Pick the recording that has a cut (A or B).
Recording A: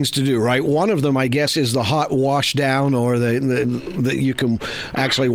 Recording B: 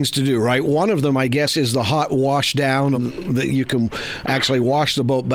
B